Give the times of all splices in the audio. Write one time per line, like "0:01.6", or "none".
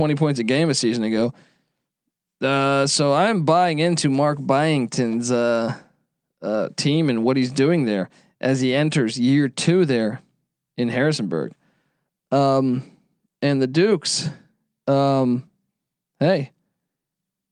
0:12.1